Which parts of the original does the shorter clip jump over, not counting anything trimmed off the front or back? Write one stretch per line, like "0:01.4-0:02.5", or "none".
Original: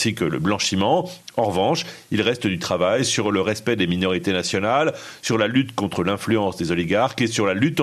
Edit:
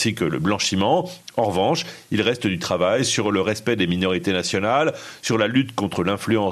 none